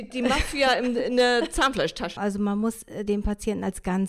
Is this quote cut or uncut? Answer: cut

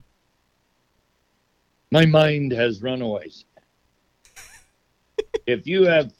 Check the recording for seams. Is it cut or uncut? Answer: cut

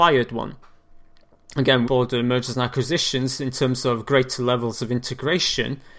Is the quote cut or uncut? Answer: cut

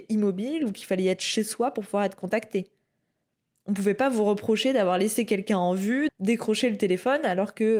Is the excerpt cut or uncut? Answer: cut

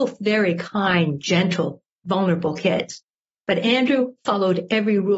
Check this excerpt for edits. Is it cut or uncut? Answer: uncut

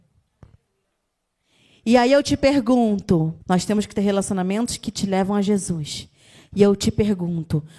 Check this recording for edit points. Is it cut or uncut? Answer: cut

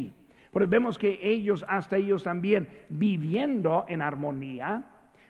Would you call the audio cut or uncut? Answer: uncut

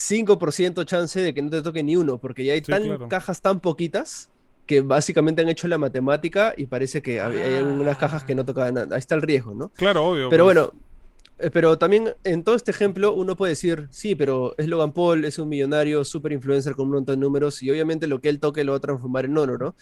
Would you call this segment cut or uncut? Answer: uncut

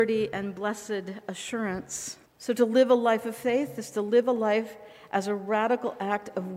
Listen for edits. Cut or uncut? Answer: cut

